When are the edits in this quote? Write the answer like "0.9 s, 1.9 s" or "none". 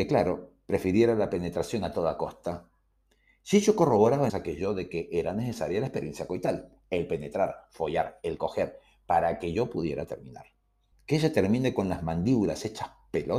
4.3 s, 10.9 s